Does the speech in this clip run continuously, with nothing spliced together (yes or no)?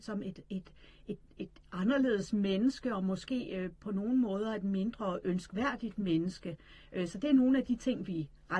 yes